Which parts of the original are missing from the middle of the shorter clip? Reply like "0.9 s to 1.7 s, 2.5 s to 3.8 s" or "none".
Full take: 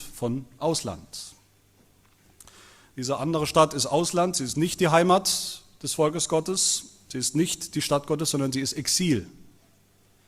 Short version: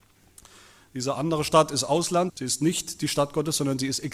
4.3 s to 7.0 s